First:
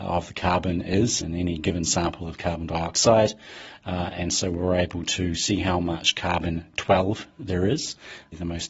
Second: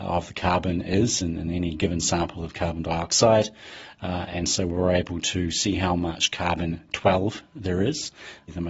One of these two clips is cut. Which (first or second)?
first